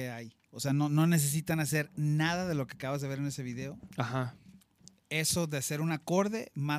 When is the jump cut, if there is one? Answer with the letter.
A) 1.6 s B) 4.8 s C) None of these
C